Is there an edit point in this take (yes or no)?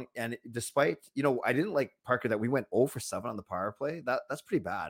no